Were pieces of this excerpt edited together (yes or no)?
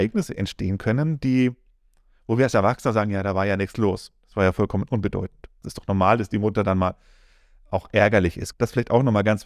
yes